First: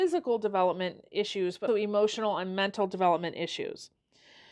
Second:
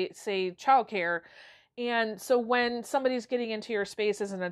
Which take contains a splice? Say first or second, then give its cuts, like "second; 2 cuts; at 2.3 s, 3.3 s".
first; 1 cut; at 1.7 s